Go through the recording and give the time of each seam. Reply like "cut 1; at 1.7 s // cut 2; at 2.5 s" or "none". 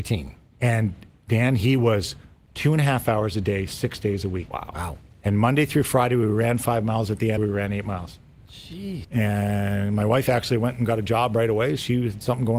cut 1; at 7.4 s // cut 2; at 9.0 s